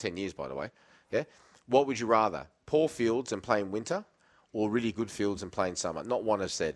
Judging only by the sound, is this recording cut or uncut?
uncut